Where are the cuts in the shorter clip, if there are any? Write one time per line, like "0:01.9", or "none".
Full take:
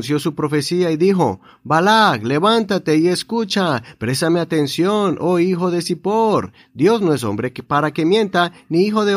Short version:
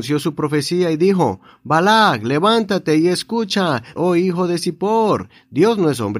0:04.0